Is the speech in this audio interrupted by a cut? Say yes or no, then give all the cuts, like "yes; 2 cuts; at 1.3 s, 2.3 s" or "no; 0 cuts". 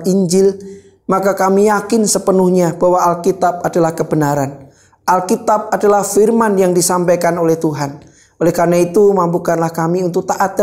no; 0 cuts